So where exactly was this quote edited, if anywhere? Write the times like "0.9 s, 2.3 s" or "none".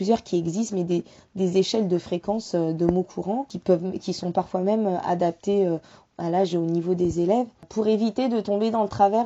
none